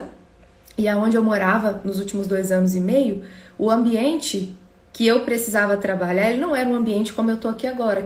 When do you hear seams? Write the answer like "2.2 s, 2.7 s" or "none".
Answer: none